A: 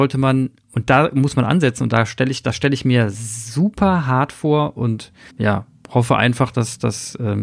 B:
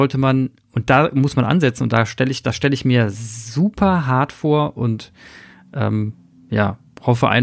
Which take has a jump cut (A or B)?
A